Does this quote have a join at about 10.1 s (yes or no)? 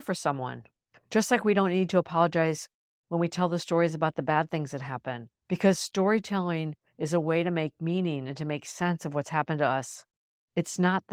no